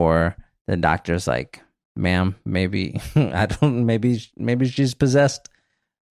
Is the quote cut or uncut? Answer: uncut